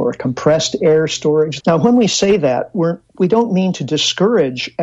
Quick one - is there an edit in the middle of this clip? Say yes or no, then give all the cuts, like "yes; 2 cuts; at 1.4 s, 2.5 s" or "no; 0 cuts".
yes; 1 cut; at 1.6 s